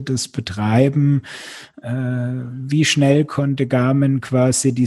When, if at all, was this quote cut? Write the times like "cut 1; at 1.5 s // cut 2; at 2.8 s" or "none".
none